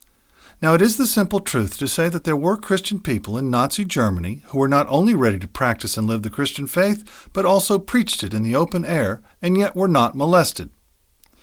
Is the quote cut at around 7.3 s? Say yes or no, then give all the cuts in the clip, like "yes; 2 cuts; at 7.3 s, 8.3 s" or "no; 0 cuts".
no; 0 cuts